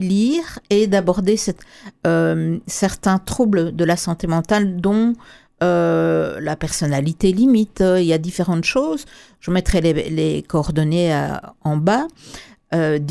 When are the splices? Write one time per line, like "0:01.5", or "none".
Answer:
none